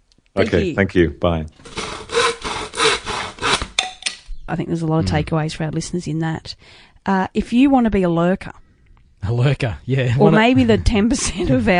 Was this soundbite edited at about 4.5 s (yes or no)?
yes